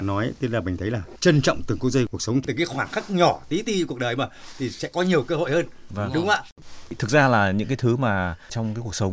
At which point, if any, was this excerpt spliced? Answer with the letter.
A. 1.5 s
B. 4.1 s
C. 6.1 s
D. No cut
D